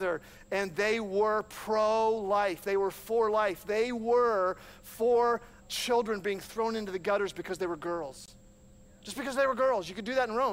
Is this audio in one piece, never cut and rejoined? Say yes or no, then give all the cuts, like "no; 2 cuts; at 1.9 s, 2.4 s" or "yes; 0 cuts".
no; 1 cut; at 5.6 s